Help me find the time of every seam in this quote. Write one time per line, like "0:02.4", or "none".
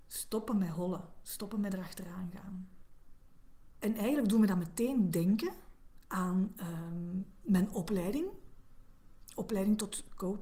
none

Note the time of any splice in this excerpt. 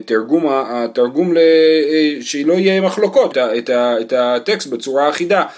0:03.3

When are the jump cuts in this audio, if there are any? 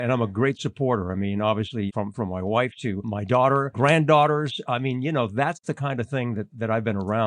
0:01.9
0:03.7

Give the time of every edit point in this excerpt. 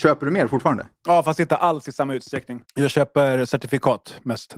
0:01.0
0:02.6

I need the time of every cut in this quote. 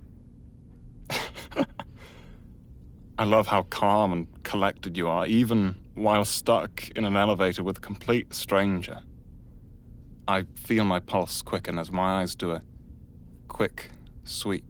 0:03.1

